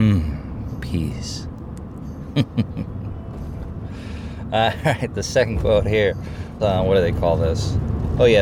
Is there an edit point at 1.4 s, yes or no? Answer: no